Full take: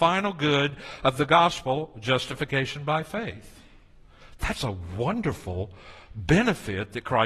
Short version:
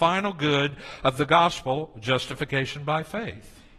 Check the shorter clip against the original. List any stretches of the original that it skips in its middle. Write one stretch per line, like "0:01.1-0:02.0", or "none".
none

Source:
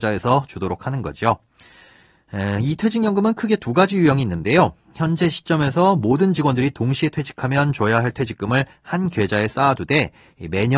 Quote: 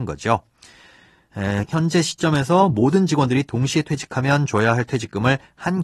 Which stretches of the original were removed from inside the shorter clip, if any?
0:02.6-0:04.9

